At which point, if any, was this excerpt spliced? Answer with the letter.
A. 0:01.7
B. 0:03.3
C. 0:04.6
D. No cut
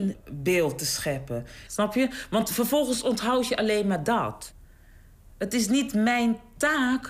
A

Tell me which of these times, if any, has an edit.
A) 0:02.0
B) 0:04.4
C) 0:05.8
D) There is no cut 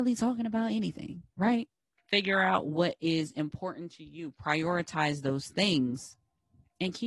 A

